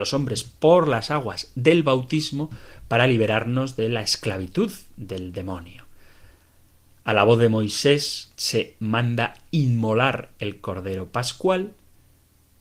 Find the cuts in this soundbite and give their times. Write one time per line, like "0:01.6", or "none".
0:08.3